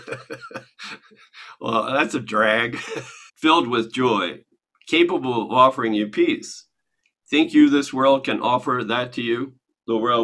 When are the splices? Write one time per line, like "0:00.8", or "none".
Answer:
0:03.3